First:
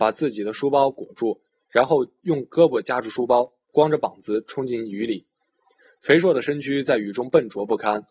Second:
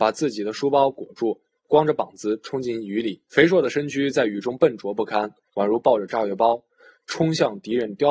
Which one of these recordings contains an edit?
second; 3 cuts; at 1.6 s, 3.3 s, 5.5 s

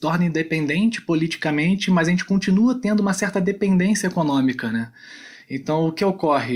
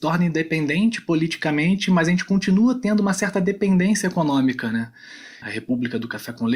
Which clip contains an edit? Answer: second; 1 cut; at 5.4 s

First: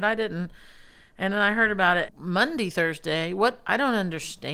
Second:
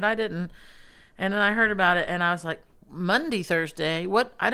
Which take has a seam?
first; 1 cut; at 2.1 s

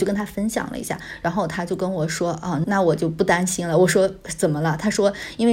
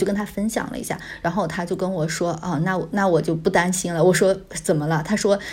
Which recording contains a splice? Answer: first; 1 cut; at 2.6 s

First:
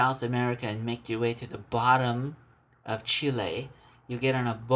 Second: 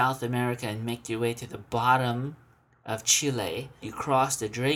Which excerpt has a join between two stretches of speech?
second; 1 cut; at 3.8 s

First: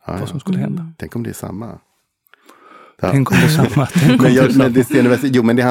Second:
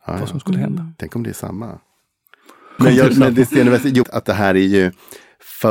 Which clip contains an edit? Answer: second; 2 cuts; at 2.8 s, 4.0 s

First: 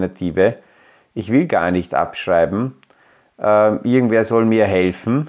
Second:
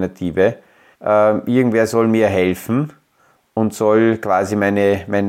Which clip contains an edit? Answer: second; 1 cut; at 0.9 s

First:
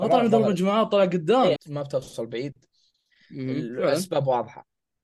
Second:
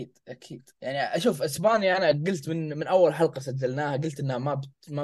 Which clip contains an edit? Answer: first; 1 cut; at 1.6 s

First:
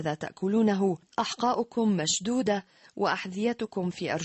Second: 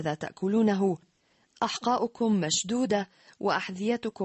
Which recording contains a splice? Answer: first; 1 cut; at 1.1 s

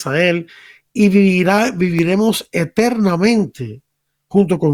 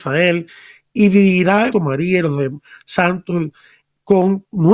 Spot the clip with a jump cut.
second; 1 cut; at 1.7 s

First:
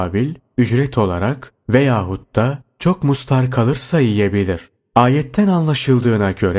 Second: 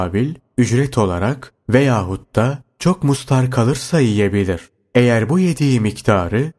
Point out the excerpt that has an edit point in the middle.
first; 1 cut; at 4.8 s

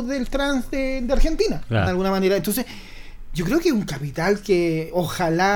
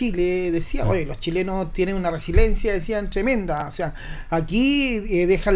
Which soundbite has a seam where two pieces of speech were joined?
first; 1 cut; at 1.9 s

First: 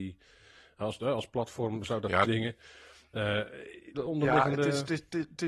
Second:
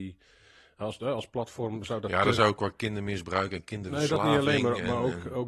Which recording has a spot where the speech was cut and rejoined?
first; 2 cuts; at 2.2 s, 3.9 s

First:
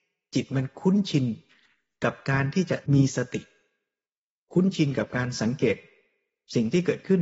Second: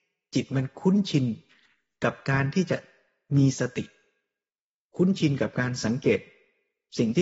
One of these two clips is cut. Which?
first; 1 cut; at 2.8 s

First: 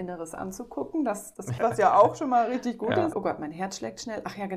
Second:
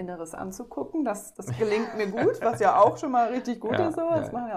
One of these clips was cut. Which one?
first; 2 cuts; at 1.6 s, 3.1 s

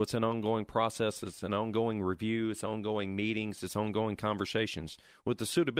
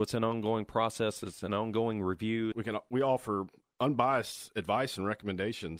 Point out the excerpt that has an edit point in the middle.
second; 1 cut; at 2.5 s

